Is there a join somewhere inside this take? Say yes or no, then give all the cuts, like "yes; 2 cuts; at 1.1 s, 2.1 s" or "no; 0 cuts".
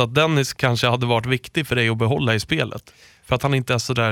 no; 0 cuts